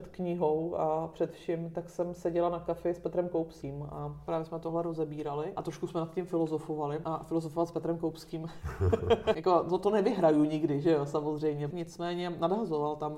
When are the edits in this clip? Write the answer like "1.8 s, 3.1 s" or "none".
9.0 s, 11.7 s